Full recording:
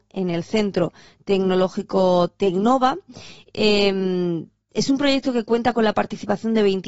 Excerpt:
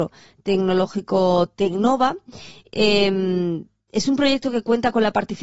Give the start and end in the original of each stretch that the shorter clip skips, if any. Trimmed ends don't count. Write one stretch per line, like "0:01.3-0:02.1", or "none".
none

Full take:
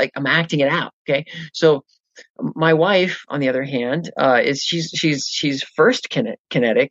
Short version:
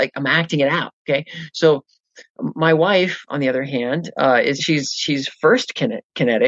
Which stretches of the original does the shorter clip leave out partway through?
0:04.6-0:04.9

